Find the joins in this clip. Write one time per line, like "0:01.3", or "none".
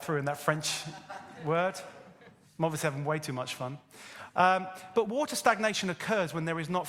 none